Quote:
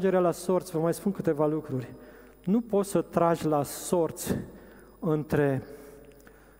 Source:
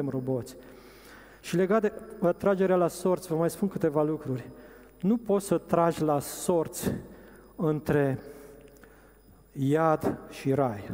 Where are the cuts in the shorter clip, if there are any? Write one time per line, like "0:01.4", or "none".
none